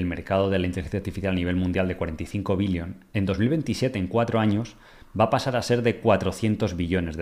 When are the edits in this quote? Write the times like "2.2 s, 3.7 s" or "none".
none

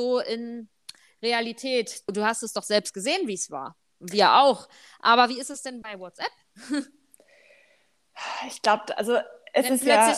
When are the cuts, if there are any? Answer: 2.1 s

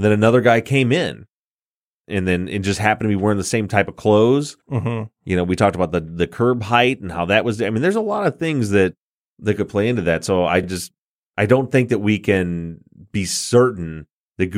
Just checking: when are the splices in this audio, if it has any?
none

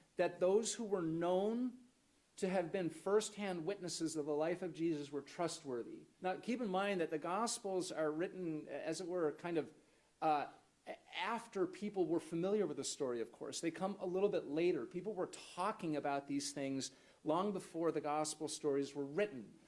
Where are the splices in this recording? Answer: 6.1 s

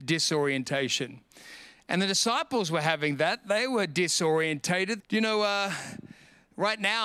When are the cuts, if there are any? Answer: 5.0 s

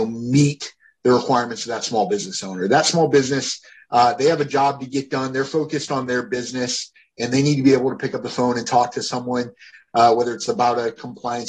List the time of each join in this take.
none

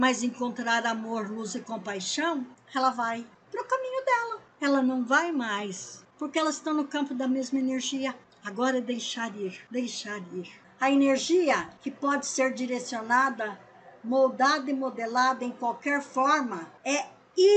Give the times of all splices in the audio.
6.1 s

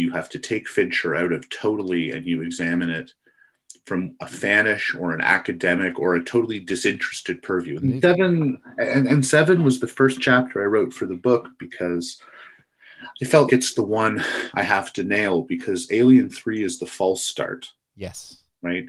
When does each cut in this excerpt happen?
7.8 s, 13.5 s

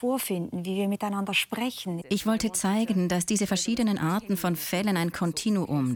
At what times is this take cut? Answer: 2.0 s

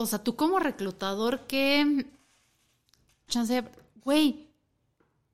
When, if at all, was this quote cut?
3.3 s

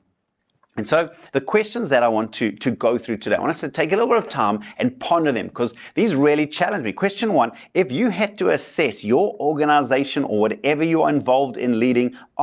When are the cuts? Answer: none

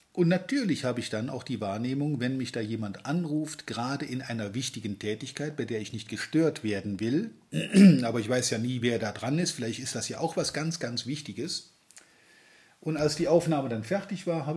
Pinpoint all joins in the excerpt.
none

